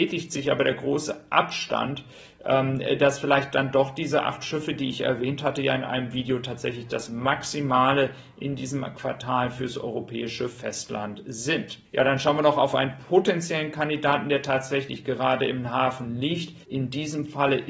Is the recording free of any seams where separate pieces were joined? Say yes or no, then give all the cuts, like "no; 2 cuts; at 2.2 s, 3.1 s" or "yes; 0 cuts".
no; 2 cuts; at 11.9 s, 16.6 s